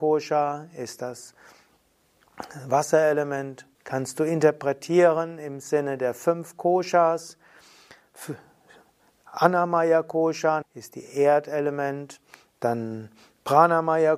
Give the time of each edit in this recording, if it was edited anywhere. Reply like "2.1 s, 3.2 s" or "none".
3.7 s, 10.6 s